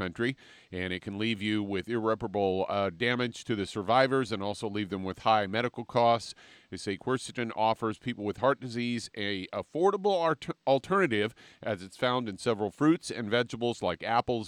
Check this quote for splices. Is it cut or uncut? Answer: uncut